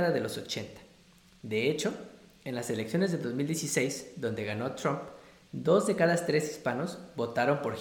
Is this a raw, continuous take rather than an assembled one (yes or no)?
yes